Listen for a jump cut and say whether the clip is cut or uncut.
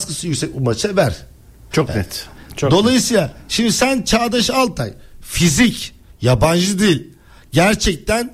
cut